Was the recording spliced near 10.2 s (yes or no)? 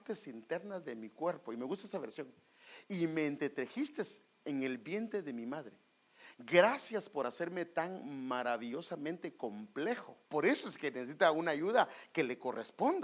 yes